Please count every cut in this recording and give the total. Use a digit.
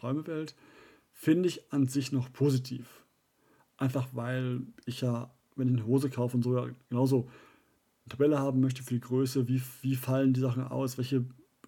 0